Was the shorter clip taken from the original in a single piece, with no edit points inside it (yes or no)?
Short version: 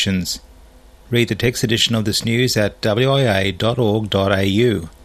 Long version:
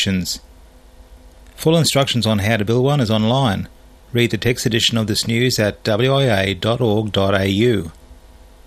no